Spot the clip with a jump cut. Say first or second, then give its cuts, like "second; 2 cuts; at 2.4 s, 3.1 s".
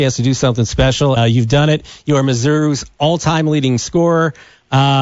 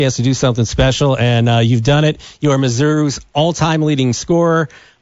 first; 1 cut; at 1.2 s